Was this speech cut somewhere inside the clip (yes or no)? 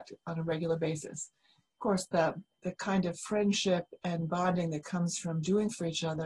no